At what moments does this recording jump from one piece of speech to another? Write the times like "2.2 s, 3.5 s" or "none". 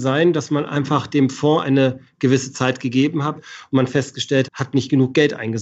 3.4 s, 4.4 s